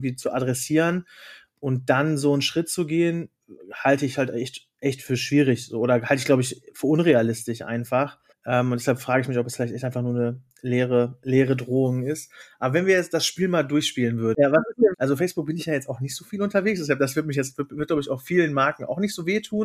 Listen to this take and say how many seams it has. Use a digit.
1